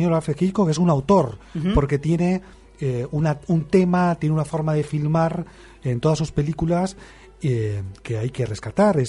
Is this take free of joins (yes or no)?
yes